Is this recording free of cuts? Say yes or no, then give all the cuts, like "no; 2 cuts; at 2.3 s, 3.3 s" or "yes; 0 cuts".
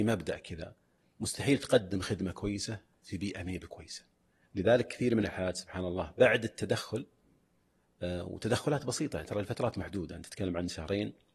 no; 1 cut; at 4.4 s